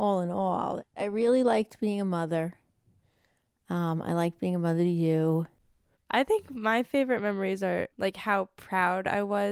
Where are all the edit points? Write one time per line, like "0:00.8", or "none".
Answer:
none